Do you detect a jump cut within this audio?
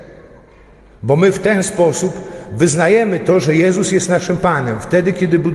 no; 0 cuts

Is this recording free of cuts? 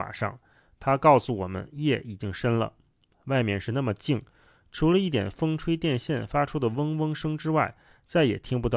yes; 0 cuts

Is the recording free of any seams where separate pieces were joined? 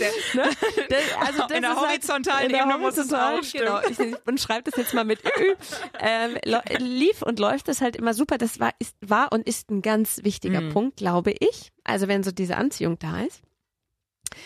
no; 1 cut; at 9.0 s

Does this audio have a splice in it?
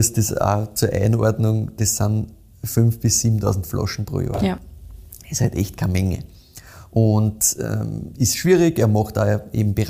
no; 0 cuts

